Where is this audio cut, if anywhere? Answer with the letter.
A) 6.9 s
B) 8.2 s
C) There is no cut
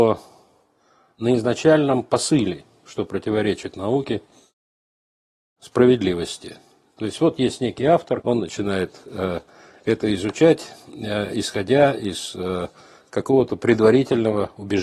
B